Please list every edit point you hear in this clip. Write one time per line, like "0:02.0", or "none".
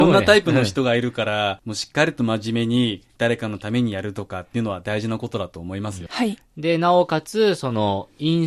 0:06.1